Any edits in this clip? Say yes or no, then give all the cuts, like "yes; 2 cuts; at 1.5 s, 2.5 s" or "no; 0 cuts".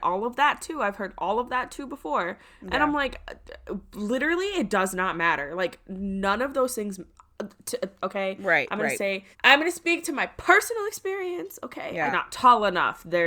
yes; 3 cuts; at 8.0 s, 9.3 s, 12.1 s